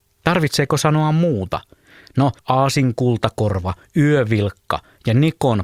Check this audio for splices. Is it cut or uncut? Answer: cut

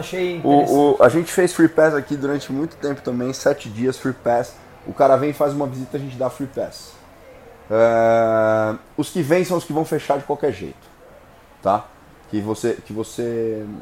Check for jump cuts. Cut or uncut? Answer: uncut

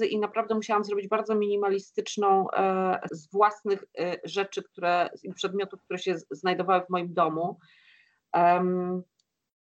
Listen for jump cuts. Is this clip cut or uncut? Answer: cut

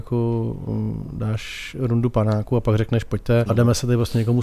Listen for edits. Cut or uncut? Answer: cut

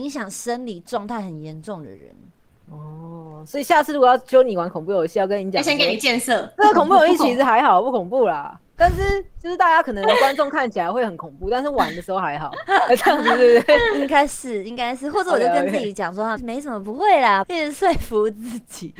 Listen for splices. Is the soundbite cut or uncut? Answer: cut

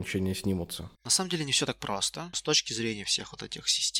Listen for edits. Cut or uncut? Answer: cut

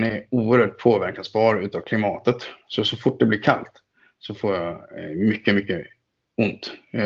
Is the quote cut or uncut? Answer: uncut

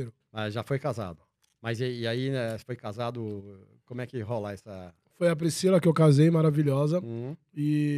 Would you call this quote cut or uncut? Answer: uncut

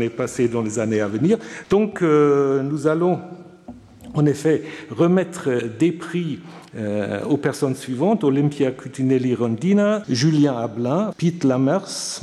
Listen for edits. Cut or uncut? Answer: cut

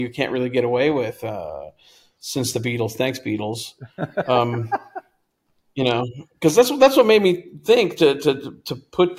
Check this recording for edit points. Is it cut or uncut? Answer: uncut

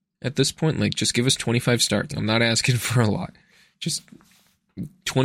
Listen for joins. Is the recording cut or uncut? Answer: cut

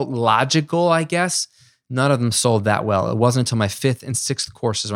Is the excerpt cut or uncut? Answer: uncut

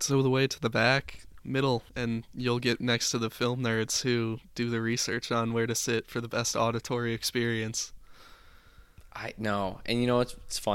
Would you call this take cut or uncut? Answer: cut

